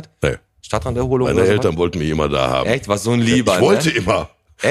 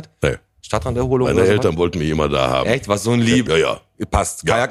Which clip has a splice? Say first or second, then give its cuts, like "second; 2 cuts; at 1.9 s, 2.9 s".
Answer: second; 1 cut; at 3.5 s